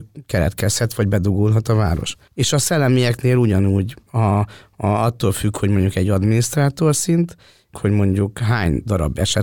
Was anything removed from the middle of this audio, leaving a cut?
yes; 2 cuts; at 2.3 s, 7.7 s

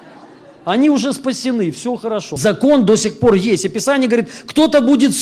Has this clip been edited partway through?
yes; 1 cut; at 2.4 s

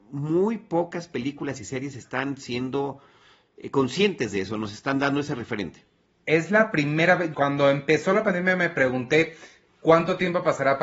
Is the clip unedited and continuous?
no; 1 cut; at 7.3 s

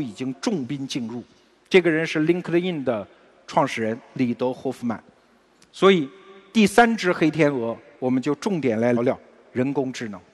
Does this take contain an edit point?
yes; 1 cut; at 9.0 s

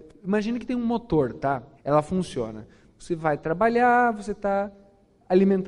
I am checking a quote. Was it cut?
yes; 1 cut; at 1.7 s

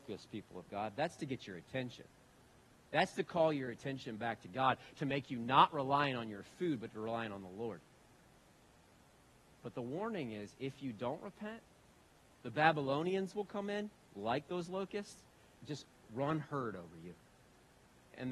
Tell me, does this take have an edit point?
yes; 1 cut; at 15.6 s

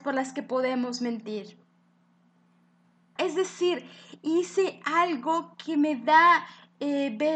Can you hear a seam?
yes; 1 cut; at 3.2 s

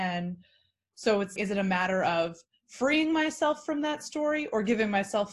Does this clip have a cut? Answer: yes; 1 cut; at 1.4 s

